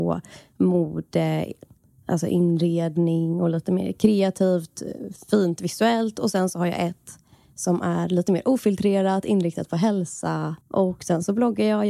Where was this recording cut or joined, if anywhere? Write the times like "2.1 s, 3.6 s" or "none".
10.6 s

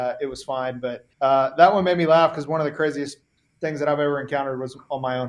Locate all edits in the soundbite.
1.1 s

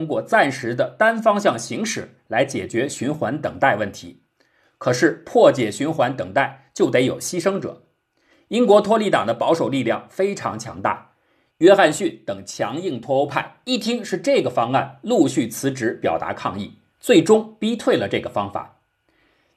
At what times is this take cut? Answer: none

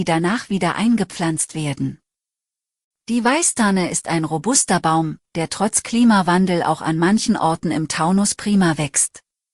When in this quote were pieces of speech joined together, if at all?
none

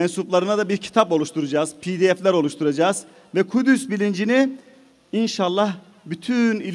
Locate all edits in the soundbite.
none

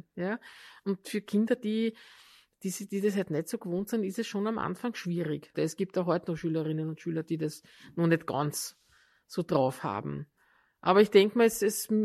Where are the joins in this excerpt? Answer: 5.5 s

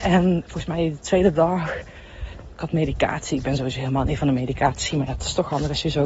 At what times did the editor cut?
2.5 s

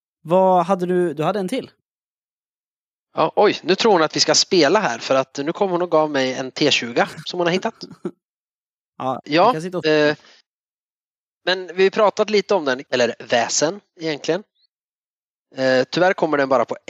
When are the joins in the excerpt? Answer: 9.2 s, 12.9 s

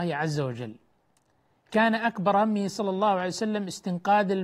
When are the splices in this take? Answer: none

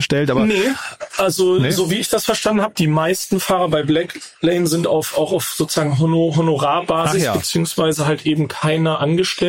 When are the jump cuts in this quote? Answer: none

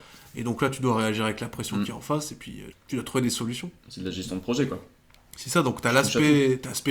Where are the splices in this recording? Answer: 2.7 s

